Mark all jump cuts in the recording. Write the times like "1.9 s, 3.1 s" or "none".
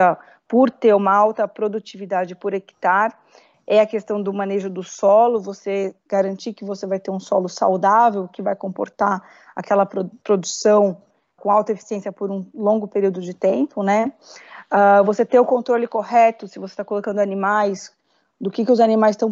11.4 s